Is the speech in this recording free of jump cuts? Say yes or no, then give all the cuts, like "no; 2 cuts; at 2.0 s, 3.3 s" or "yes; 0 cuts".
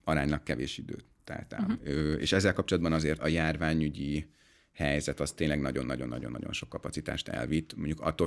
no; 2 cuts; at 1.8 s, 3.2 s